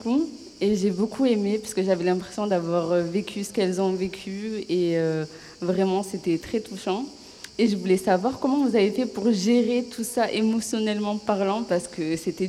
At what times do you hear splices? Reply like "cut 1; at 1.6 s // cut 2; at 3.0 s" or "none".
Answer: none